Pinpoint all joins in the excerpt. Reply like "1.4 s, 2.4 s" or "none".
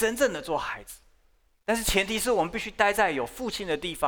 1.5 s